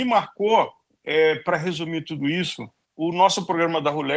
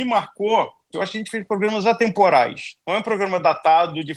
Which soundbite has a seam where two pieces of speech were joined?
second; 1 cut; at 0.9 s

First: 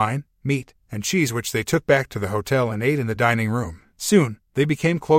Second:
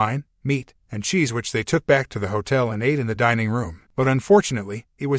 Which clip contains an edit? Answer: second; 1 cut; at 3.9 s

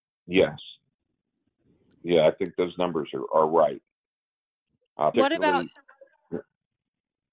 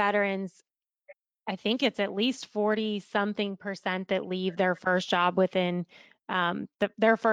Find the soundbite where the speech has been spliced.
first; 1 cut; at 5.1 s

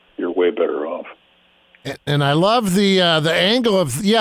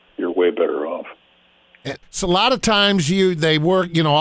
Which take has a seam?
second; 1 cut; at 2.0 s

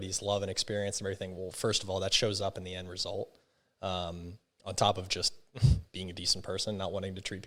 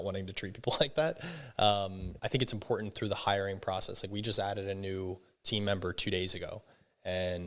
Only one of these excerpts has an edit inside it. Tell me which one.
second; 1 cut; at 2.2 s

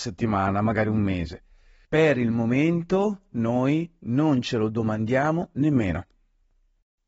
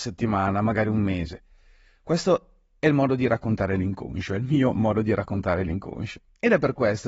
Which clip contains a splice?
first; 1 cut; at 1.8 s

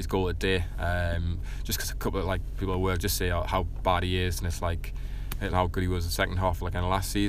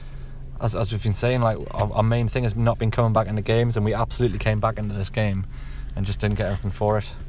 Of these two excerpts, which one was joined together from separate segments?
first; 2 cuts; at 2.6 s, 5.5 s

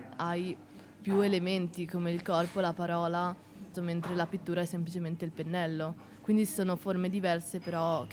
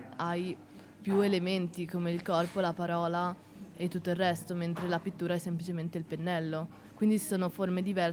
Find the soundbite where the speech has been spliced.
first; 1 cut; at 3.7 s

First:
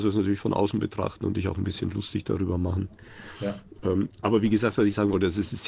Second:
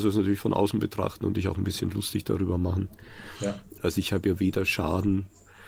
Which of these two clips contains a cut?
second; 1 cut; at 3.8 s

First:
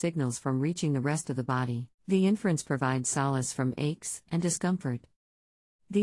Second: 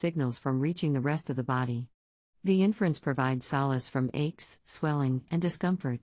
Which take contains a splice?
first; 2 cuts; at 2.0 s, 4.3 s

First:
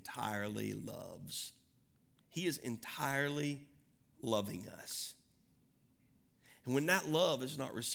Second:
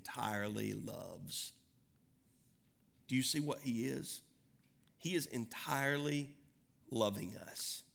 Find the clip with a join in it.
first; 1 cut; at 2.2 s

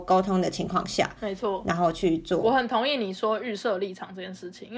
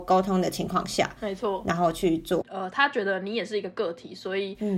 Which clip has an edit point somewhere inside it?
second; 1 cut; at 2.4 s

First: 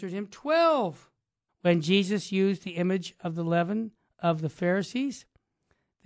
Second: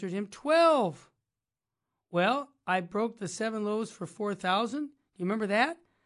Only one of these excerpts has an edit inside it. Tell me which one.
first; 1 cut; at 1.5 s

